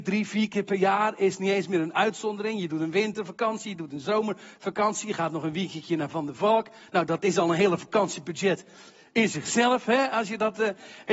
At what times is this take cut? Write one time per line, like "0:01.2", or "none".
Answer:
none